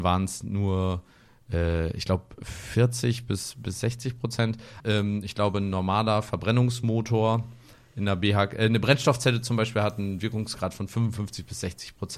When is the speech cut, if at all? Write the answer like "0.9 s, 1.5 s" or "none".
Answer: 4.8 s